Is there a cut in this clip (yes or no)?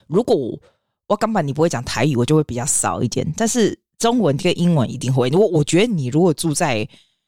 no